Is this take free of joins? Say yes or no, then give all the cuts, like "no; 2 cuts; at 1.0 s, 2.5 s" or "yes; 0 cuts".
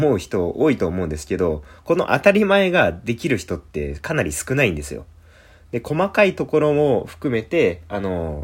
yes; 0 cuts